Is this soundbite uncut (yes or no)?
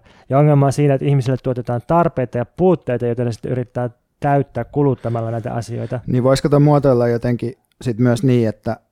yes